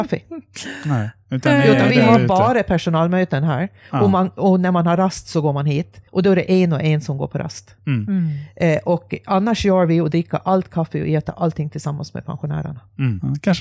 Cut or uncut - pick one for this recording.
cut